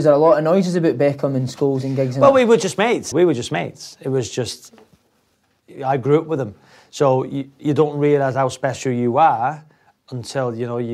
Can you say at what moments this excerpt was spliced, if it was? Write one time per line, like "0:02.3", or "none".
0:03.1